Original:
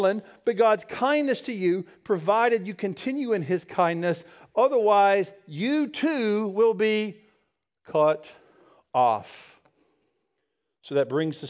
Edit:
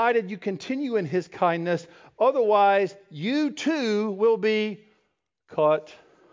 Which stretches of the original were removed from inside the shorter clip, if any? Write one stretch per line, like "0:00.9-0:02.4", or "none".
none

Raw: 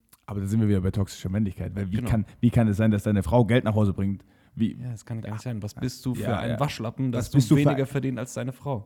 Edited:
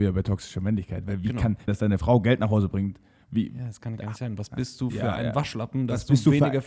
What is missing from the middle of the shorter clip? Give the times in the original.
0:02.4-0:02.9

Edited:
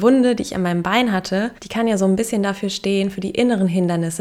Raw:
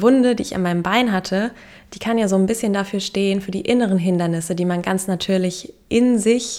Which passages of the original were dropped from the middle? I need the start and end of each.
0:01.6-0:01.9

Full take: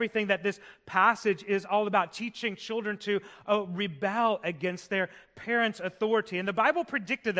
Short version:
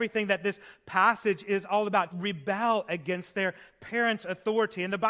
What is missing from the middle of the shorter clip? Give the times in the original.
0:02.1-0:03.7

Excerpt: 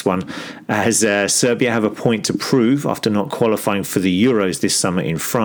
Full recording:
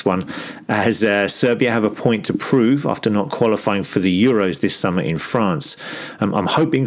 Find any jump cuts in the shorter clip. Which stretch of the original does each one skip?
none

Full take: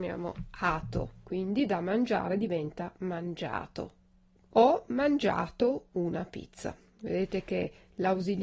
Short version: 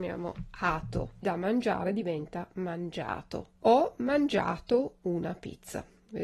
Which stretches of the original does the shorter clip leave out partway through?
0:01.2-0:01.7
0:04.0-0:04.5

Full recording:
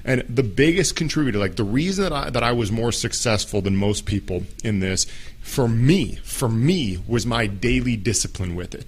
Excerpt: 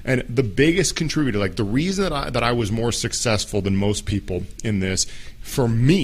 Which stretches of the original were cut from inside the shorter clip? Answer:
none

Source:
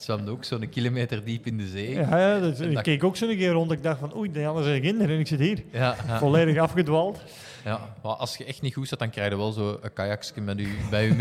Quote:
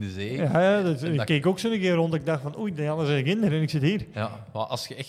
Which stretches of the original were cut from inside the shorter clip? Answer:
0:05.7-0:07.6

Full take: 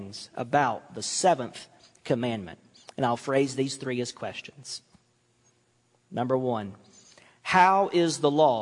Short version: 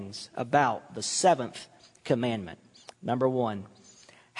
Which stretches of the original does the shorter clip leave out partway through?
0:02.9-0:06.0

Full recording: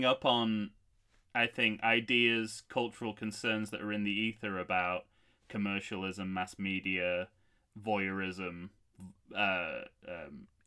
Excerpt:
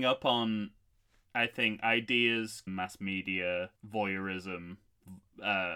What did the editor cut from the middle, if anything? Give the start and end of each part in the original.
0:02.7-0:06.3
0:07.3-0:07.7

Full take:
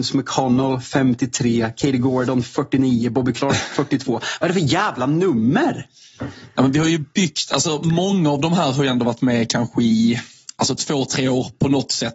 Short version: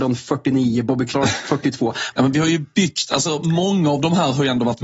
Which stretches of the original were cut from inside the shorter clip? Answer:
0:04.4-0:06.5

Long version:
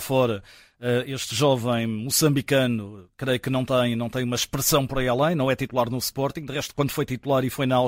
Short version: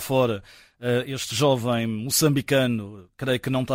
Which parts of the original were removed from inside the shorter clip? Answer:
none

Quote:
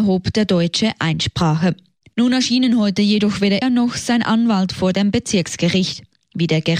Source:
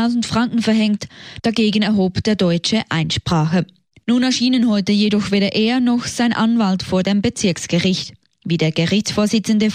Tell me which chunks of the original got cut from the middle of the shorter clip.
0:05.5-0:05.7

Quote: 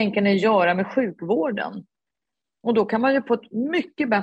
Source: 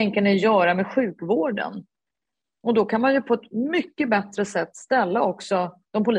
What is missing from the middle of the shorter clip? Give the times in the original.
none

